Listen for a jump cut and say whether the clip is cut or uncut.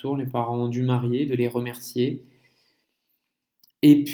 cut